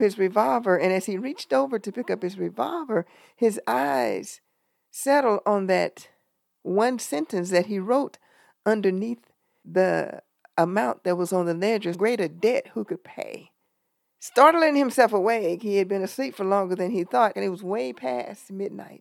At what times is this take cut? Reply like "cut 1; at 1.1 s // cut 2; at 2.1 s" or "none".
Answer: cut 1; at 11.9 s // cut 2; at 14.2 s // cut 3; at 17.3 s